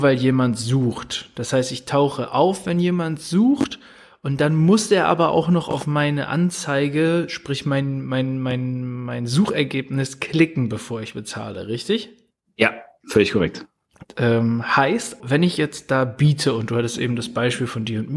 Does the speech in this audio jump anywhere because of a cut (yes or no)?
yes